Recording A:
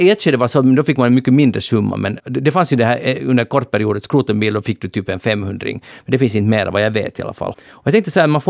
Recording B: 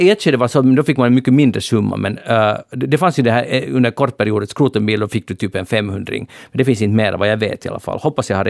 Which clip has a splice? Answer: A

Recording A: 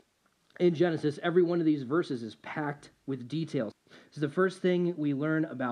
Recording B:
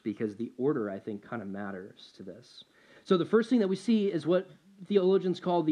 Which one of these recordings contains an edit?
A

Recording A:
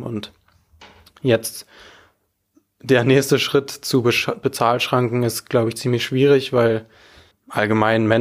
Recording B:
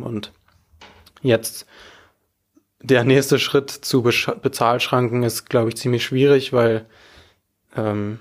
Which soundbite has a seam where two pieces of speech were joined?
A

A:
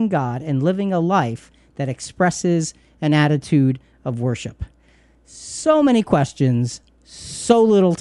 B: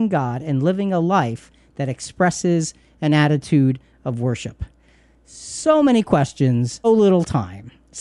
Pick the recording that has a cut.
B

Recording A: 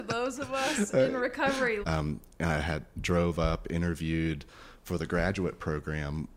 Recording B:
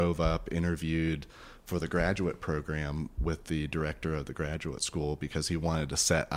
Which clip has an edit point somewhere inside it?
A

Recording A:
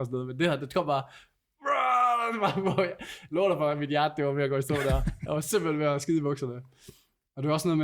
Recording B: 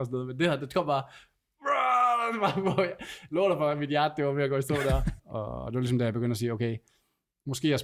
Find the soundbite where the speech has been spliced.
B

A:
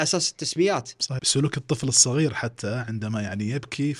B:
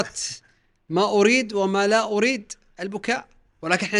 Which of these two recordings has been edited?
A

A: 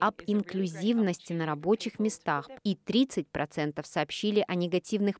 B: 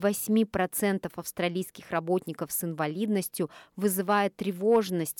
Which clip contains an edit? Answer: A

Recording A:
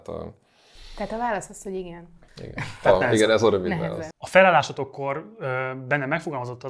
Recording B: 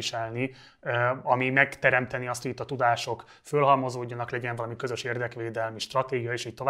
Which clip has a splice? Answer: A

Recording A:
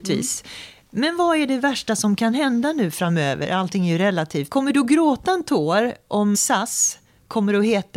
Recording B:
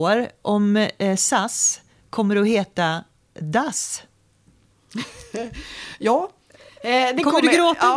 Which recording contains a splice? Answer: A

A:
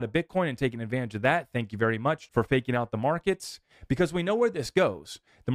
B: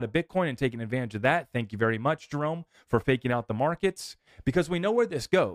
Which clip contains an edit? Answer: A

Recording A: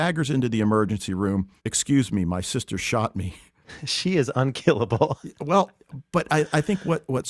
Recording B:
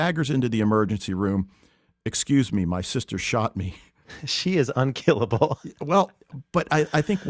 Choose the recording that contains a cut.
A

